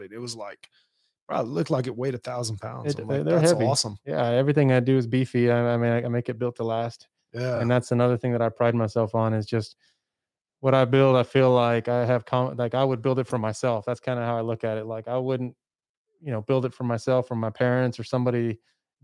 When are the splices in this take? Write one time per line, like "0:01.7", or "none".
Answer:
none